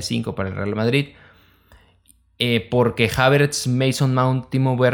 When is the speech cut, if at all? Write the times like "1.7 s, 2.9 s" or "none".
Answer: none